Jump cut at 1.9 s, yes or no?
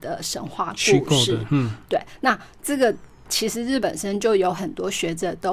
no